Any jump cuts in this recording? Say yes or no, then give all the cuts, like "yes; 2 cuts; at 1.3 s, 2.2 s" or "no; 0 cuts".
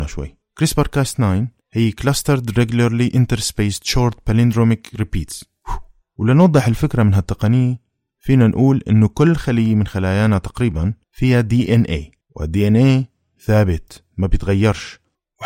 yes; 2 cuts; at 11.0 s, 12.2 s